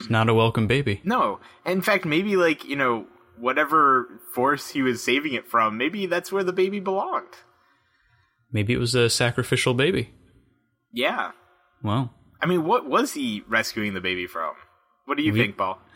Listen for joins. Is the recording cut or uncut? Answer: uncut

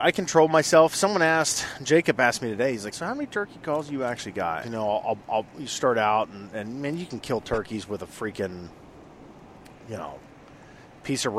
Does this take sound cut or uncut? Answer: cut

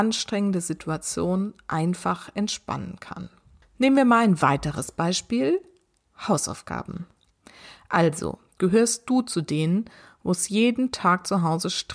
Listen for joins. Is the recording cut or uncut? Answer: uncut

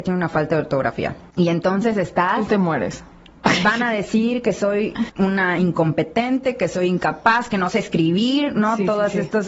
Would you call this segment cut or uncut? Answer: uncut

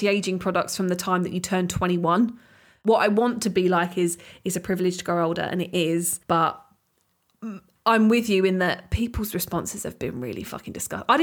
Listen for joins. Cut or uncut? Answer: cut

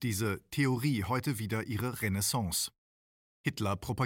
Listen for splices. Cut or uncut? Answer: uncut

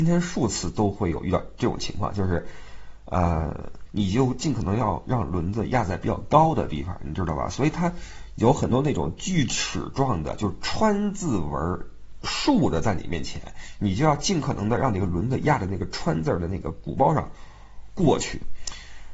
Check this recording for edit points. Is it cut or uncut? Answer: cut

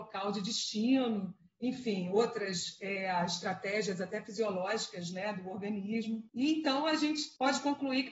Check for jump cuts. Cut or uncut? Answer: uncut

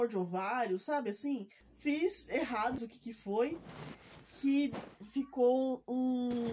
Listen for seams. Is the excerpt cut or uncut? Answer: cut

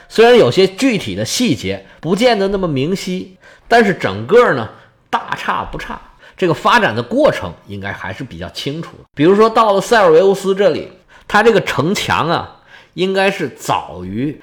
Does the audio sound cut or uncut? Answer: uncut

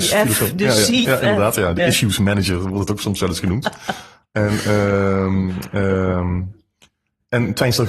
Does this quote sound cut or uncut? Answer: cut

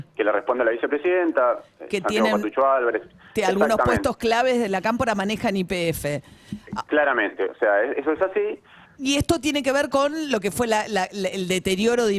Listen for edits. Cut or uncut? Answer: cut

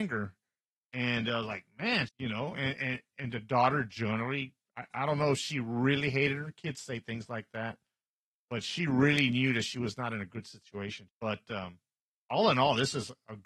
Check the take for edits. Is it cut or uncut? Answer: cut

